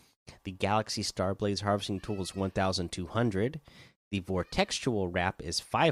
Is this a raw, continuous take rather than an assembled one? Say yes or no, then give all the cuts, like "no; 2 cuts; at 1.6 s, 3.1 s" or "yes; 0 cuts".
yes; 0 cuts